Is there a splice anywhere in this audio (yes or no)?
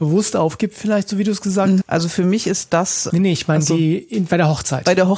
yes